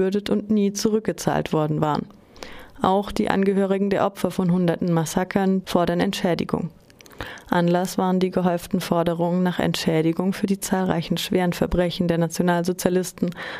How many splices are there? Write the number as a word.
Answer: two